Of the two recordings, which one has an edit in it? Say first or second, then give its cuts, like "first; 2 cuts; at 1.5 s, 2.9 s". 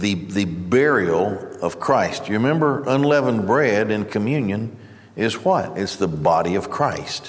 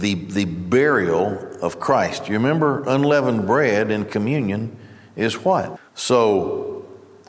second; 1 cut; at 5.8 s